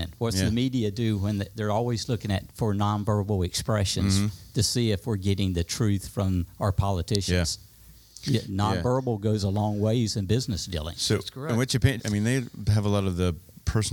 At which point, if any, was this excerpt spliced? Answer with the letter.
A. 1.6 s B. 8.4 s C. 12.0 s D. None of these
C